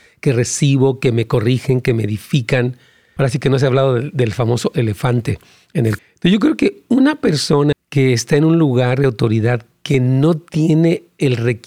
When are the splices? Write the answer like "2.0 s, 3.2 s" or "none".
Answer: 3.2 s, 6.0 s, 7.7 s